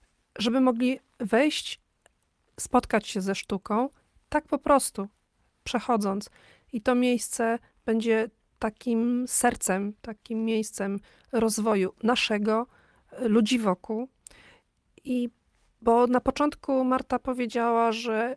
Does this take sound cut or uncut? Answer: uncut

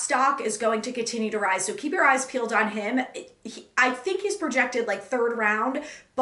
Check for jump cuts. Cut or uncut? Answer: uncut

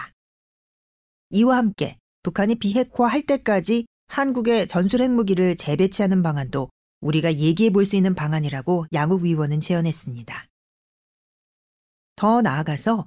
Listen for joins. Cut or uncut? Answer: cut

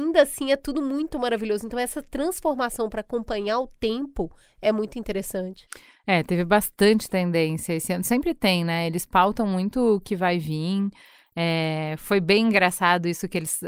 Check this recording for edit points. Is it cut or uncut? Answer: uncut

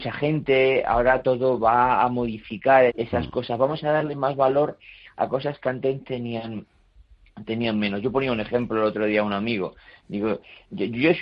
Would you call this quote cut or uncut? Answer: cut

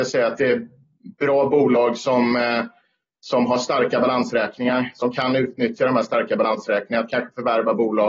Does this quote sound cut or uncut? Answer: uncut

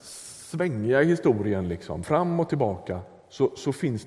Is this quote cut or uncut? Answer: uncut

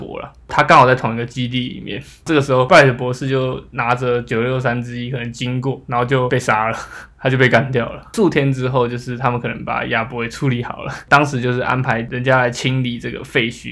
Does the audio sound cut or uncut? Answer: uncut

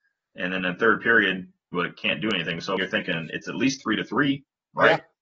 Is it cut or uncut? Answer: cut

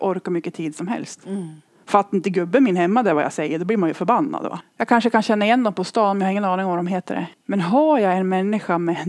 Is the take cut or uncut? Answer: cut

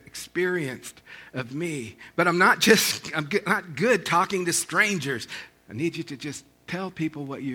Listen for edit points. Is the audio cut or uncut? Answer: uncut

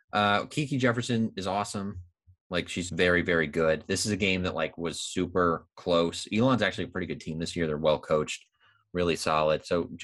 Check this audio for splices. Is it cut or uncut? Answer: cut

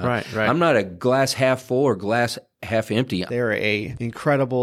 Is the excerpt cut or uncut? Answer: cut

